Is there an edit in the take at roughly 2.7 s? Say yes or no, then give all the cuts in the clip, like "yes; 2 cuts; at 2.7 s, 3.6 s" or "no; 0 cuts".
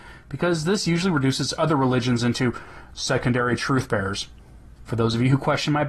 no; 1 cut; at 4.8 s